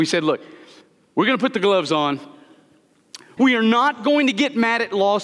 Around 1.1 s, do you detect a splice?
no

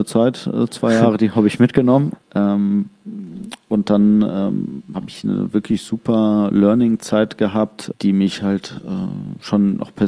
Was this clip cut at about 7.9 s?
yes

